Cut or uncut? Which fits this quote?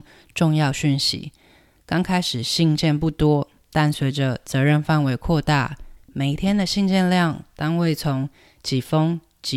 cut